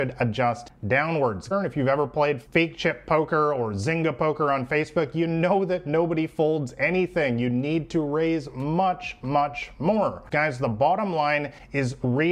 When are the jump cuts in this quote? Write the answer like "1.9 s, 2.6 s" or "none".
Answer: 1.5 s, 10.3 s